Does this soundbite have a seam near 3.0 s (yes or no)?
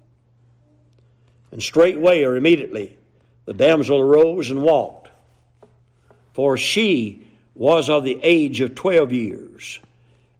no